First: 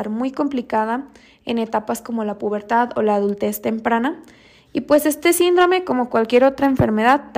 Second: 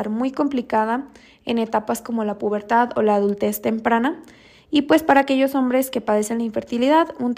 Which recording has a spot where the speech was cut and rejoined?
first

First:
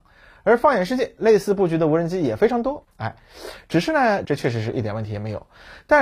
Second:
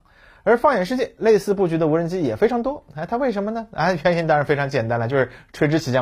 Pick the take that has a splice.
first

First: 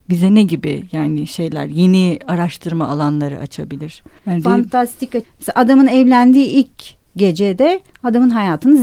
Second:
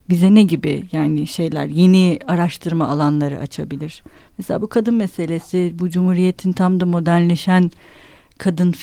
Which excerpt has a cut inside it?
first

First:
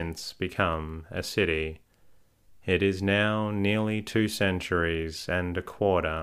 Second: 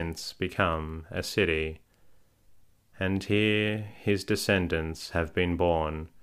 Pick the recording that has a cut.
first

